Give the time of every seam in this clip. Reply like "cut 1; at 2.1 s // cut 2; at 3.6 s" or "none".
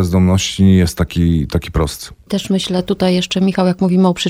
none

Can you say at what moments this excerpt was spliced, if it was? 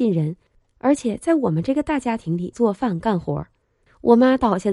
cut 1; at 2.5 s

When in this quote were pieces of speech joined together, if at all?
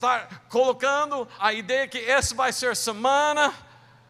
cut 1; at 1.4 s

